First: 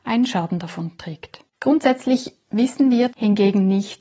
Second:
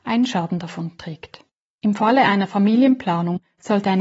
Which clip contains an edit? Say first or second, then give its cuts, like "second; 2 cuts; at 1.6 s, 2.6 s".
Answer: first; 2 cuts; at 1.5 s, 3.1 s